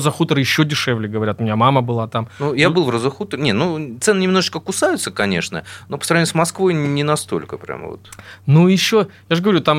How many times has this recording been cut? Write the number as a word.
zero